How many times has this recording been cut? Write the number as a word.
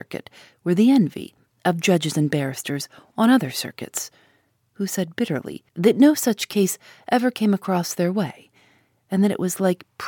one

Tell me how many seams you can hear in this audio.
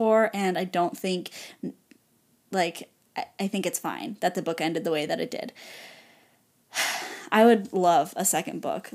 zero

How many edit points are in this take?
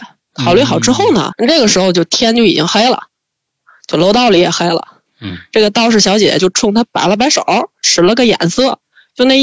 two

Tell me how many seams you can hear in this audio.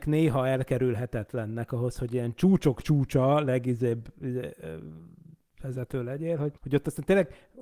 one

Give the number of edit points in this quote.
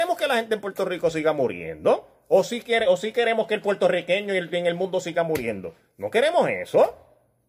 zero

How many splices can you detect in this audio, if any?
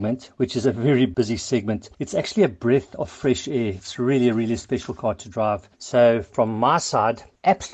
zero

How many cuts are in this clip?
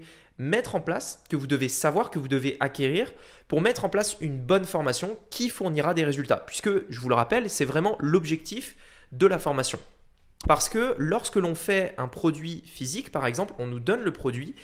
one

